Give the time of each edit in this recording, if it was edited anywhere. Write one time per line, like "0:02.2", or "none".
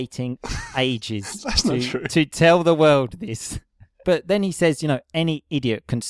0:04.0